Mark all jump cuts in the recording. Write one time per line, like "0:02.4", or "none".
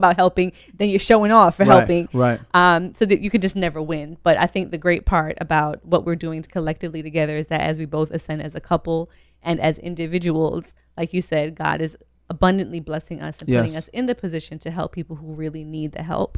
none